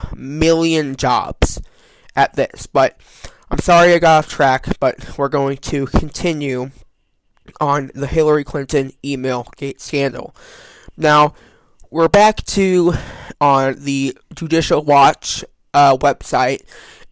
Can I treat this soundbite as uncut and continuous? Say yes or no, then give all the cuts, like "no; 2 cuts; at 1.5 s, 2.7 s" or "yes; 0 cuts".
no; 1 cut; at 13.3 s